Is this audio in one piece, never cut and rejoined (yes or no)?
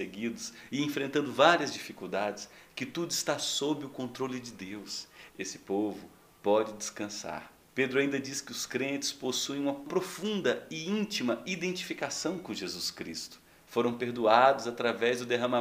no